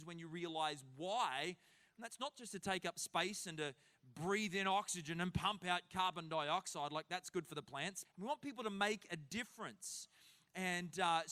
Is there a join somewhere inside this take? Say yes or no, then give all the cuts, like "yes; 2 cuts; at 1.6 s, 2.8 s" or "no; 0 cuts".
yes; 1 cut; at 8.1 s